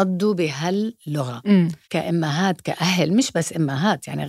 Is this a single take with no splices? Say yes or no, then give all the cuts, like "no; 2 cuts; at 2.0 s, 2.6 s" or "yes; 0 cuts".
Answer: no; 1 cut; at 1.8 s